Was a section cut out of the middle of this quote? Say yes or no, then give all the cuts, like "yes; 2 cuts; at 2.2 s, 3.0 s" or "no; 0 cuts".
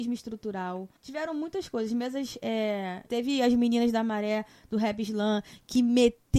yes; 2 cuts; at 1.0 s, 3.1 s